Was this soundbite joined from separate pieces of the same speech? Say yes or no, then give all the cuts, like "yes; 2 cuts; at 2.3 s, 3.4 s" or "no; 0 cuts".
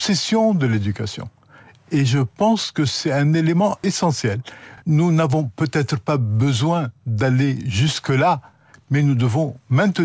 no; 0 cuts